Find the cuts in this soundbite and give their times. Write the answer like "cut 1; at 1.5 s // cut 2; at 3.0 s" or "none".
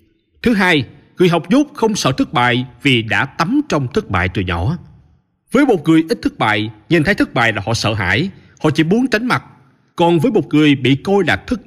none